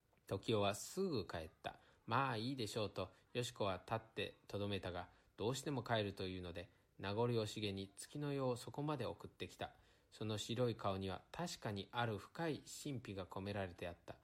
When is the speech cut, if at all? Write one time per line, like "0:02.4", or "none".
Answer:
none